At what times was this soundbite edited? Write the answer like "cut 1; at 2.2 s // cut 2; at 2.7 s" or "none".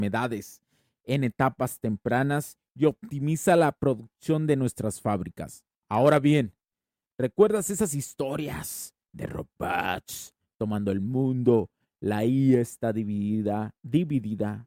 none